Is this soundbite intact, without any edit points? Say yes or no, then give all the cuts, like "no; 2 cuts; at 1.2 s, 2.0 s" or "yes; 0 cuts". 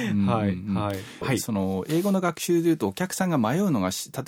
no; 1 cut; at 1.2 s